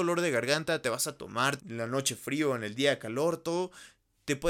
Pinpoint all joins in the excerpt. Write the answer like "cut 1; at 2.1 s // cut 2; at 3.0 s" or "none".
cut 1; at 1.6 s